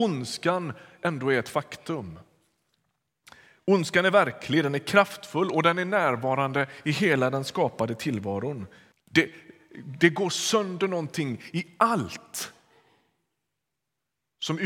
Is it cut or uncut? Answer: cut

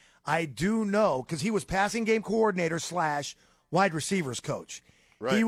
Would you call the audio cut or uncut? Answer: uncut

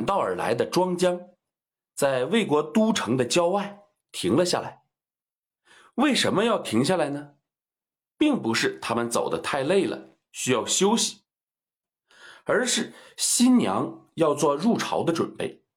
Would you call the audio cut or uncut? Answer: uncut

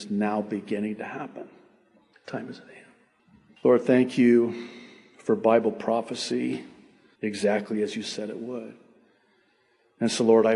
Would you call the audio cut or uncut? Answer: cut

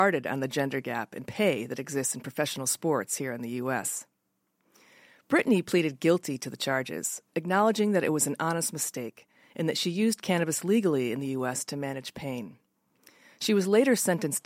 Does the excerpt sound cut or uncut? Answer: uncut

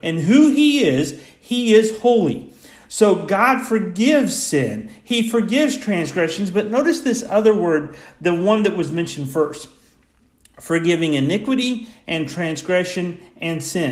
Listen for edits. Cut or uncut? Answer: uncut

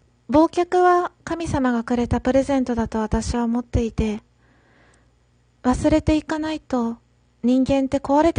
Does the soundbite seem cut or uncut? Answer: uncut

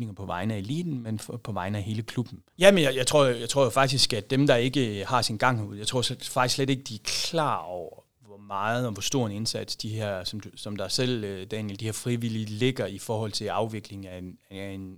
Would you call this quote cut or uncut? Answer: cut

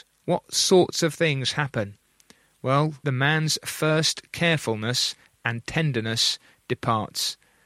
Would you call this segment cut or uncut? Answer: cut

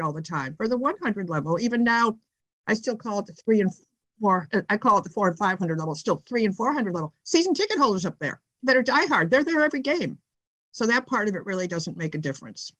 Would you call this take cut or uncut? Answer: cut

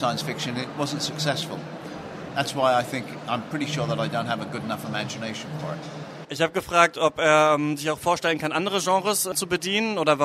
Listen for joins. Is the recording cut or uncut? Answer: uncut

